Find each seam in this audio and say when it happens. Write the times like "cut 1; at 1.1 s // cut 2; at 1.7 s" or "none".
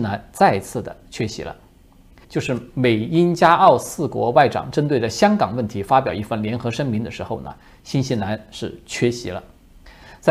cut 1; at 2.2 s

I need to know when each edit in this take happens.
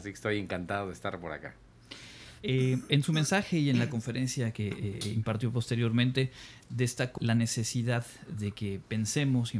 cut 1; at 7.2 s

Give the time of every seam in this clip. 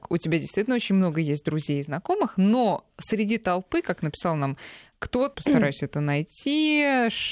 cut 1; at 5.3 s

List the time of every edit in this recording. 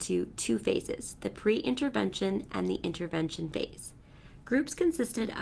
cut 1; at 4.4 s

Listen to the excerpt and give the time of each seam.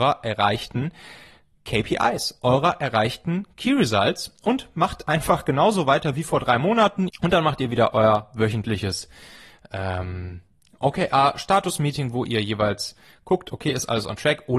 cut 1; at 7.1 s

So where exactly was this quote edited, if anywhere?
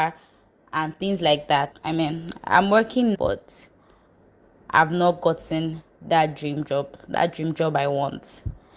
cut 1; at 1.7 s // cut 2; at 3.1 s

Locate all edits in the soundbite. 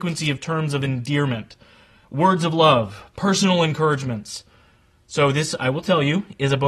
none

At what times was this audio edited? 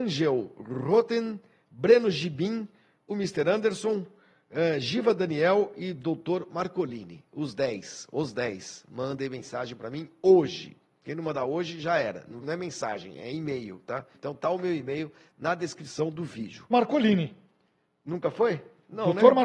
cut 1; at 12.4 s // cut 2; at 14.1 s // cut 3; at 16.7 s

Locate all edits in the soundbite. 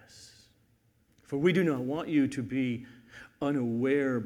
cut 1; at 1.1 s

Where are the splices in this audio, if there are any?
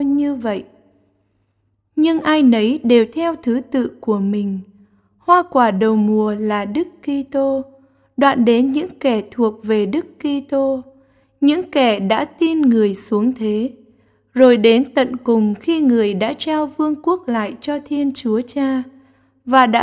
none

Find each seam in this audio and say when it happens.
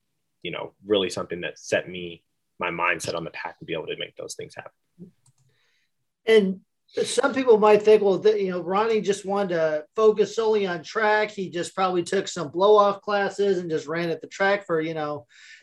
none

